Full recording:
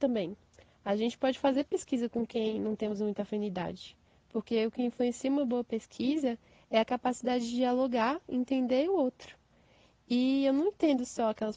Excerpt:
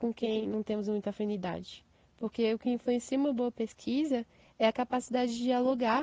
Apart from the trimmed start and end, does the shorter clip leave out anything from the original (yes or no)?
no